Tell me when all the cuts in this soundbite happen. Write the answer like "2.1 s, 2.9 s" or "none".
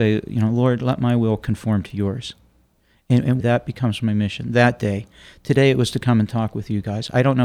3.4 s

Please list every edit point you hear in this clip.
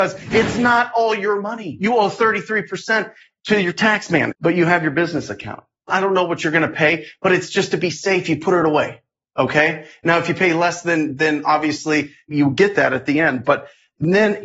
4.3 s, 5.9 s

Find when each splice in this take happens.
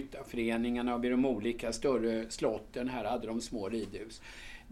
none

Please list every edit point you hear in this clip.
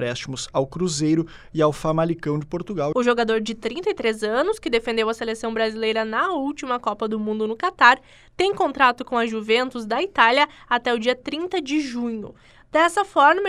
2.9 s

